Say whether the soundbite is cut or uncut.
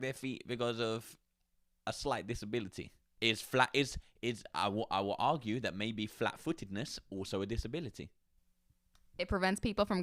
uncut